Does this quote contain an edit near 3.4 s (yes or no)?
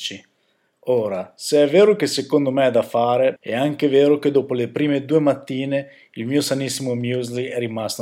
yes